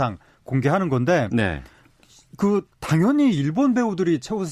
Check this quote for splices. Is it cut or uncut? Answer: uncut